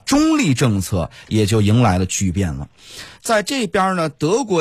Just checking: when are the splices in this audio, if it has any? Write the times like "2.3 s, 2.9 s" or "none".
3.2 s